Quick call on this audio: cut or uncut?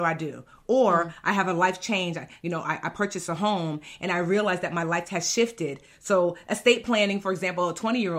uncut